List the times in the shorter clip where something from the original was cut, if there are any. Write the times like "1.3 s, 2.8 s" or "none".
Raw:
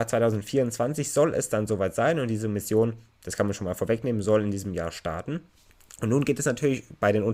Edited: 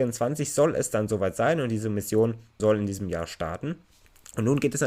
2.6 s